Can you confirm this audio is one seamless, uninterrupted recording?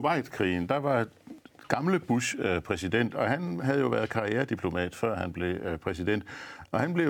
yes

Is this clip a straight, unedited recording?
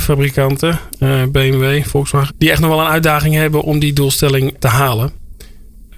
no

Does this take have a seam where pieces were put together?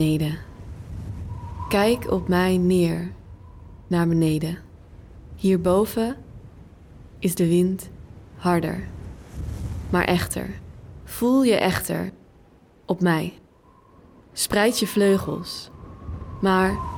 no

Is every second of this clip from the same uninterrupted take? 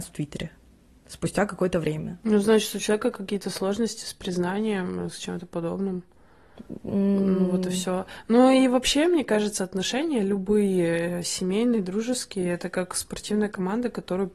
yes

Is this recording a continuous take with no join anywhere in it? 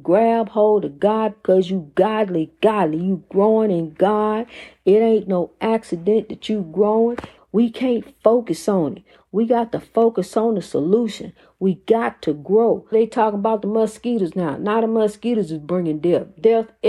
no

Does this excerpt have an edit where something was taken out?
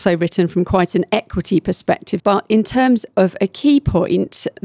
yes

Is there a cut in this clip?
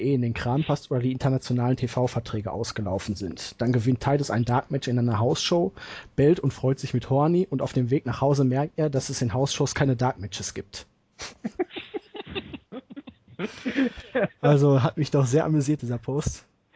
no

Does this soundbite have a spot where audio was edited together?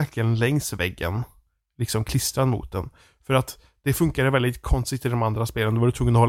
no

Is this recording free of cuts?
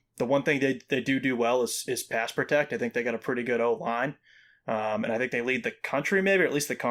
yes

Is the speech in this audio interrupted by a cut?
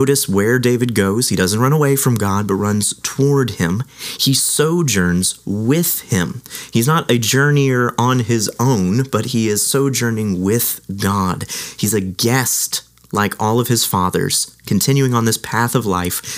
no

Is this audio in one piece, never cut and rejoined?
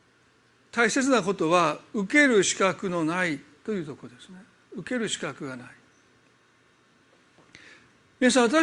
yes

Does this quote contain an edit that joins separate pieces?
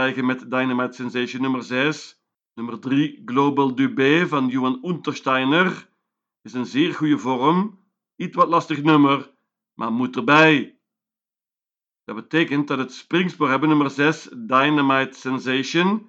yes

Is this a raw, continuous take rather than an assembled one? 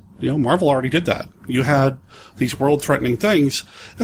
yes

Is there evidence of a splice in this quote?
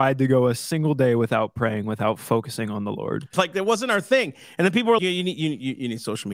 yes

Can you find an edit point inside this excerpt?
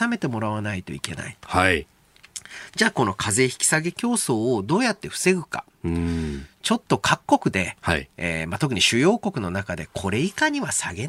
no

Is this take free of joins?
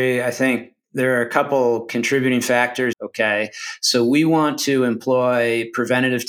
no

